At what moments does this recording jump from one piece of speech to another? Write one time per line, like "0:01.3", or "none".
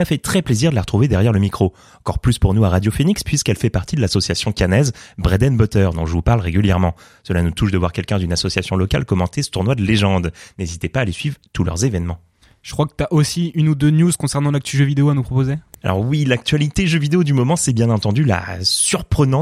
none